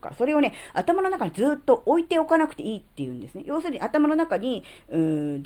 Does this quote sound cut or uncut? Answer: uncut